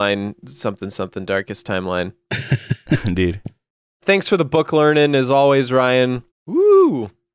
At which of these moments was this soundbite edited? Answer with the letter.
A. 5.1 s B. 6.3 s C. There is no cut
B